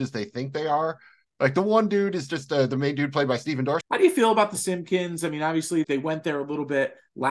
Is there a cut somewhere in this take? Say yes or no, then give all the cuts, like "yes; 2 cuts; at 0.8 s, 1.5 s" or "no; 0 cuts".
yes; 2 cuts; at 3.8 s, 5.8 s